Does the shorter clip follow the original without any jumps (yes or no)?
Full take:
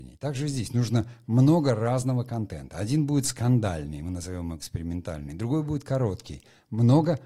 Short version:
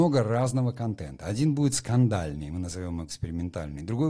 yes